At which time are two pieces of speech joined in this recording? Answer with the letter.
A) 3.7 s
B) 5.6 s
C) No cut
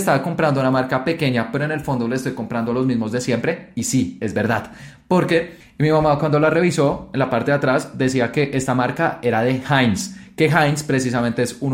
B